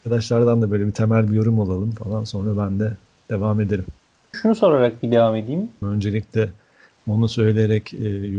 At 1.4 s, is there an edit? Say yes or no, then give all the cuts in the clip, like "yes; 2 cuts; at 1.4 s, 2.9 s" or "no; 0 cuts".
no; 2 cuts; at 4.3 s, 5.8 s